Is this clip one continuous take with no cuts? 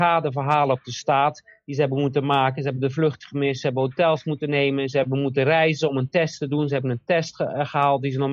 yes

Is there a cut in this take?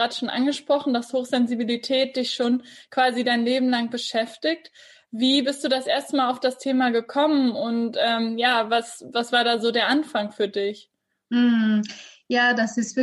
no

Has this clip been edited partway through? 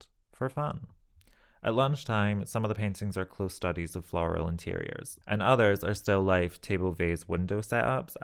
yes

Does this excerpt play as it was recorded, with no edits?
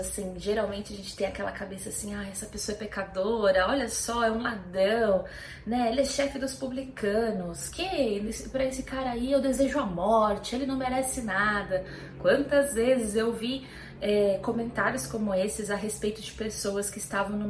yes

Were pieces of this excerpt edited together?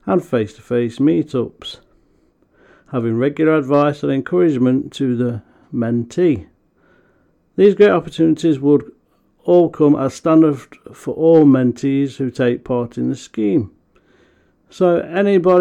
no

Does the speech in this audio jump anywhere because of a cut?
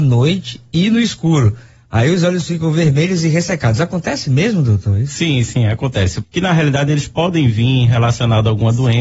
yes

